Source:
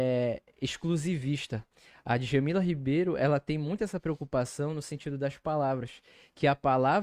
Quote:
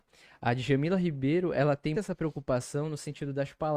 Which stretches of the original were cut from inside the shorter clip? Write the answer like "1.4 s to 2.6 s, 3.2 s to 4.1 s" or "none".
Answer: 3.6 s to 3.8 s